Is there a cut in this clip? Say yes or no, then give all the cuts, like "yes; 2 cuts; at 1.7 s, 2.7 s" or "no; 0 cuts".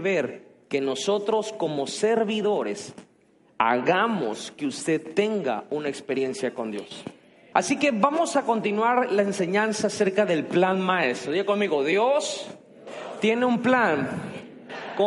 yes; 1 cut; at 7.5 s